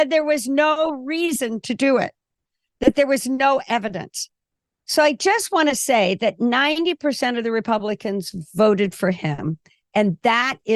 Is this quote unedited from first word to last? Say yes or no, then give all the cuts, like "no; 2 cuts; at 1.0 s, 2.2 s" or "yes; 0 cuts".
no; 1 cut; at 4.8 s